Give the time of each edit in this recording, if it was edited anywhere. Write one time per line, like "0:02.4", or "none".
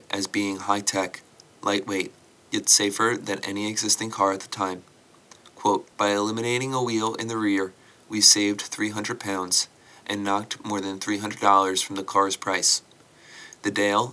0:05.9